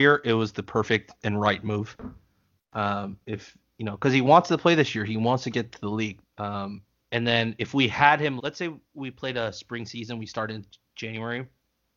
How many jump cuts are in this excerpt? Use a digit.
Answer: 2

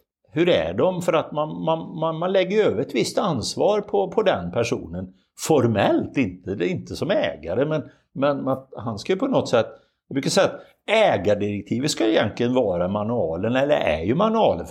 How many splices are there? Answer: 0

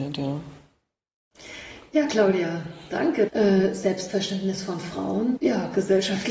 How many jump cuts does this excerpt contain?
2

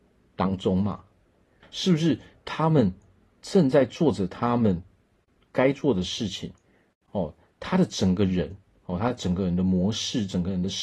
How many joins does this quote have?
1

